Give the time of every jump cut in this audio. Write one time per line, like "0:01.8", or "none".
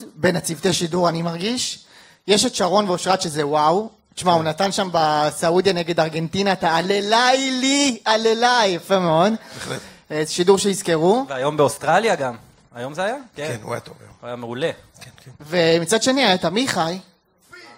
none